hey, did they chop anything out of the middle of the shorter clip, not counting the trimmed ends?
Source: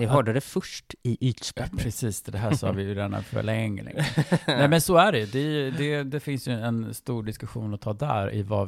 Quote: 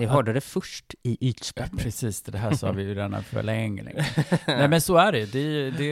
no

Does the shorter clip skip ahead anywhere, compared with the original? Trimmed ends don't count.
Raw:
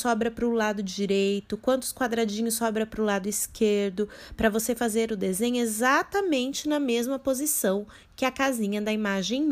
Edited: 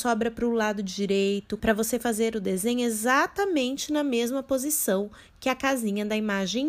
yes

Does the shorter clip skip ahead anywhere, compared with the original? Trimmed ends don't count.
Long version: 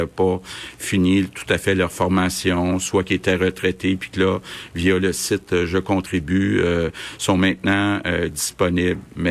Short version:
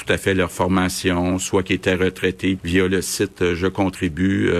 yes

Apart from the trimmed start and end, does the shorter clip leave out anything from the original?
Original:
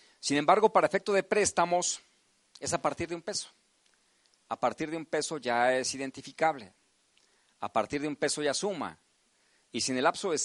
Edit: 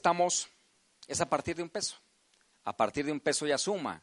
yes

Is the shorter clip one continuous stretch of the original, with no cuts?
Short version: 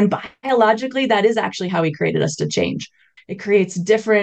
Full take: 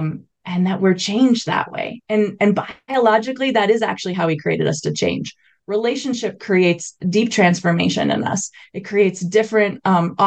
no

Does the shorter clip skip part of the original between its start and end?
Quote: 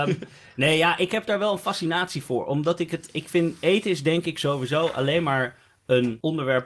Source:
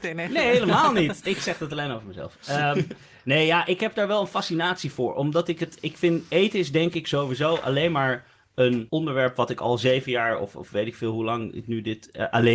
no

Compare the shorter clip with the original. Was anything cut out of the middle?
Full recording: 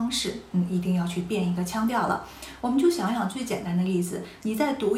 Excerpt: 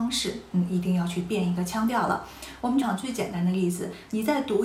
yes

